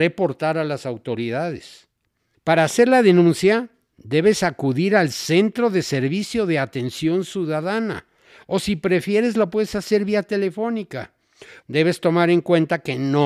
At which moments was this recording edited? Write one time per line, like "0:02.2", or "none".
0:02.3
0:11.6